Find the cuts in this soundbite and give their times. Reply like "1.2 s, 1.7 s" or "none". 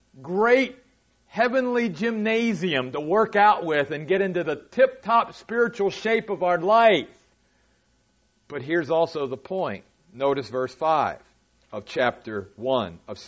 none